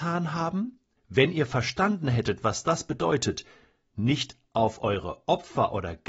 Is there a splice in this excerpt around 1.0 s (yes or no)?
yes